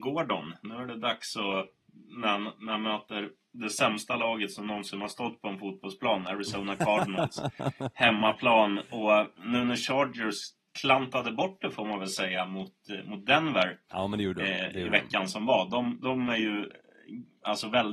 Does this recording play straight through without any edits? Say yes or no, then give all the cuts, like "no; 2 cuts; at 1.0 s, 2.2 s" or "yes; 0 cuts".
yes; 0 cuts